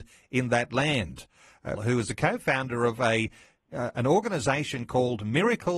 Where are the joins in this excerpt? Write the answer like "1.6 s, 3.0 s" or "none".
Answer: 1.7 s